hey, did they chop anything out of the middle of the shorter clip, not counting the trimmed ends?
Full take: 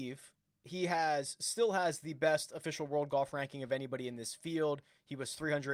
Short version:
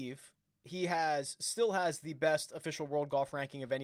no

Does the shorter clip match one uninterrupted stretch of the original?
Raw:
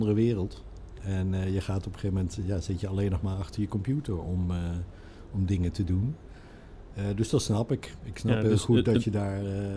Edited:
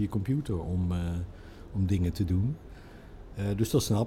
yes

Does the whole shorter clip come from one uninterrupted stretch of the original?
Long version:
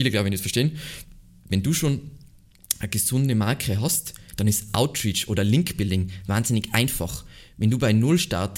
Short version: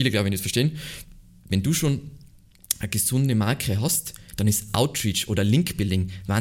yes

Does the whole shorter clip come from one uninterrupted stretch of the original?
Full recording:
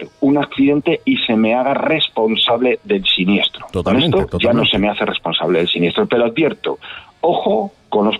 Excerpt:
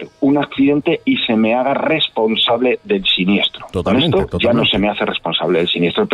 yes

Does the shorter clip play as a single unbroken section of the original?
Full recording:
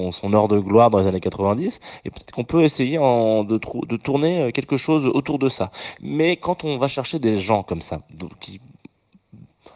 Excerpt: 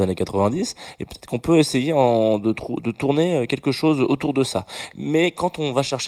yes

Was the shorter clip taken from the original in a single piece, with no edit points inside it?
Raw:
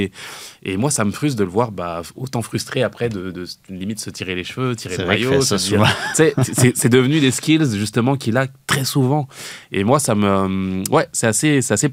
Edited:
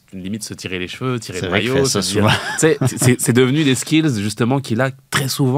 yes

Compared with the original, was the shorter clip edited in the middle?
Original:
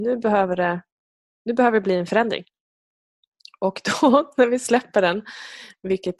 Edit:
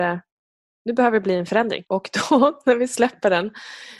yes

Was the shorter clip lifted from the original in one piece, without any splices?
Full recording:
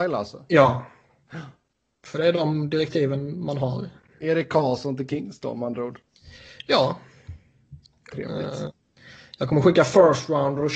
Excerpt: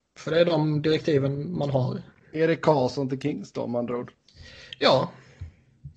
yes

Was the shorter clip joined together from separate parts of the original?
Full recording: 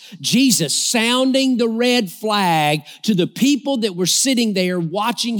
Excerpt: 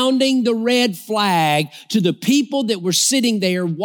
no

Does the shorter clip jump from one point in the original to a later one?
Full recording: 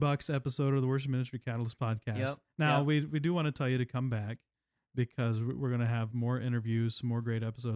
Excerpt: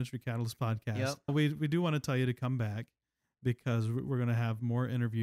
yes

